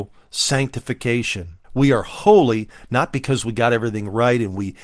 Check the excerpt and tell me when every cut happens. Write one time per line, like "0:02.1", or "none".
0:01.6